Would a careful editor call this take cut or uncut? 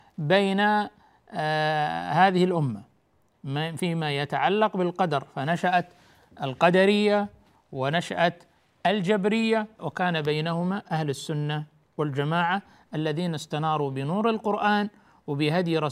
cut